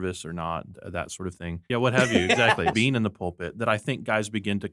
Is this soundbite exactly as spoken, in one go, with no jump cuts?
no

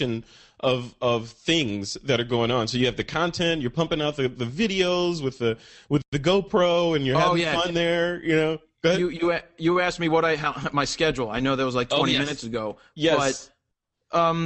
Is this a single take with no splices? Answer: yes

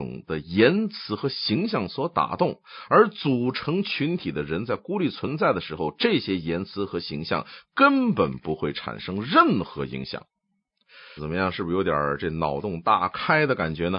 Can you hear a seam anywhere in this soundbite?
yes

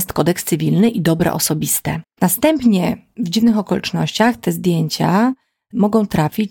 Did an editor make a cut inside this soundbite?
yes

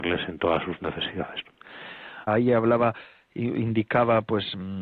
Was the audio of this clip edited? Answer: yes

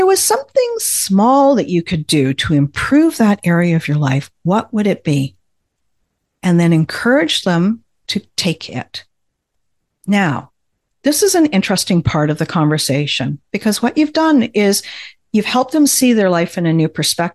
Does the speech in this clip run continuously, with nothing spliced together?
yes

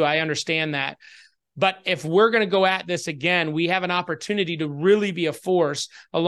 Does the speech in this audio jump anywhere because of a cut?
no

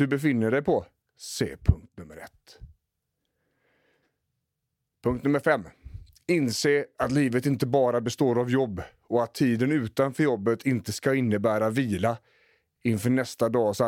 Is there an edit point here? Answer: yes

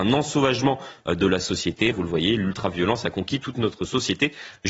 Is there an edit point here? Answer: yes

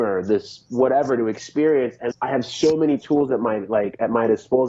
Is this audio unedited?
no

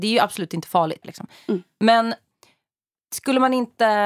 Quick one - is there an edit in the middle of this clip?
yes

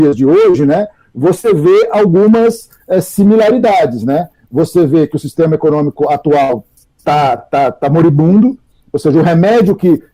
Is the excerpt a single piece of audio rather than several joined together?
yes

